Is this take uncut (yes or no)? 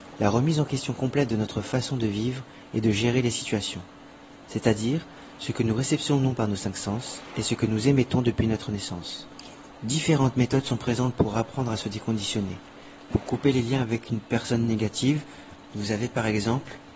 no